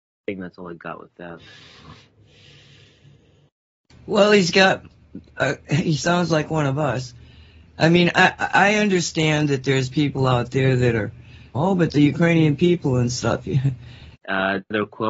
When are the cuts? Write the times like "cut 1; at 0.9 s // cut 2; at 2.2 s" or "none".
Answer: cut 1; at 9.9 s // cut 2; at 11.5 s // cut 3; at 14.1 s